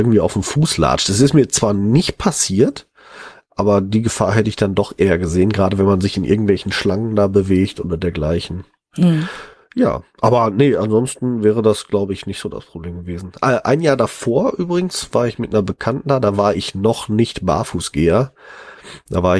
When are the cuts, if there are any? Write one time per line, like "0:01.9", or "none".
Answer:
none